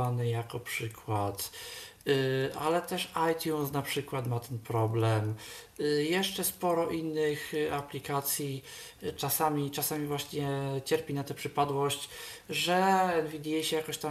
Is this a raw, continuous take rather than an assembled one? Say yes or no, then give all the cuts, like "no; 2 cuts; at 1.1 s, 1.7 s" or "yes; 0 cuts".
yes; 0 cuts